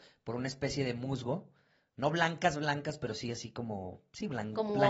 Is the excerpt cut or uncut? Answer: uncut